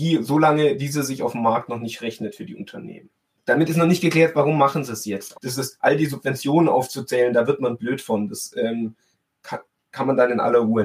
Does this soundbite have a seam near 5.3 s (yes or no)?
yes